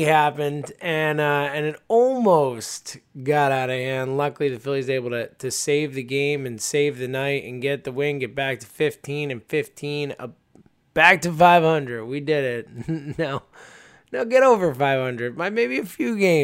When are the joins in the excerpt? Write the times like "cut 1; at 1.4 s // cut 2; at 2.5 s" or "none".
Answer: none